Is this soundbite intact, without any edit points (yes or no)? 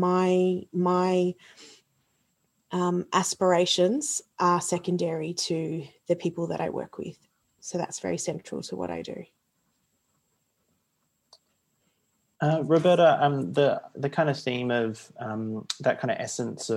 yes